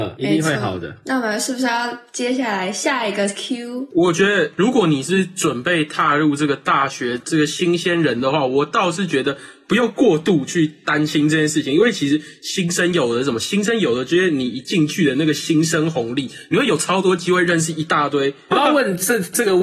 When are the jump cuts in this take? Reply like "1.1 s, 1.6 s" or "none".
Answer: 3.9 s, 7.2 s, 18.5 s